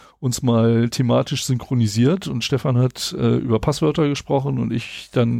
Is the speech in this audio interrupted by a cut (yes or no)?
no